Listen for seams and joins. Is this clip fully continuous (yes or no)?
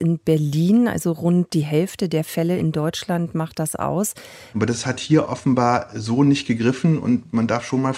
no